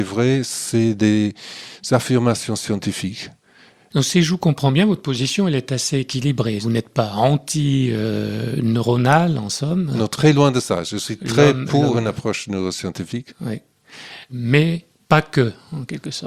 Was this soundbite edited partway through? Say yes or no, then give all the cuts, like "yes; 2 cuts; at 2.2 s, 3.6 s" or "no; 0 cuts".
yes; 1 cut; at 3.9 s